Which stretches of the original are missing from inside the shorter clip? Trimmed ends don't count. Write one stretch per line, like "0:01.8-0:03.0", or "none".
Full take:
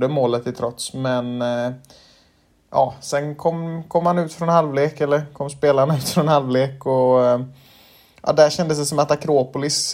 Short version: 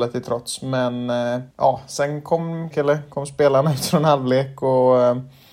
0:01.8-0:02.6
0:03.8-0:04.9